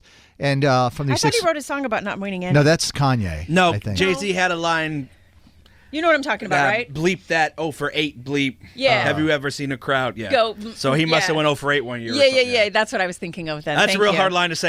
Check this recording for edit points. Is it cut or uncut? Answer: uncut